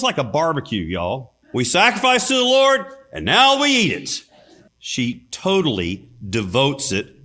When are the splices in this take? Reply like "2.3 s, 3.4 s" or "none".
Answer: 1.4 s, 4.7 s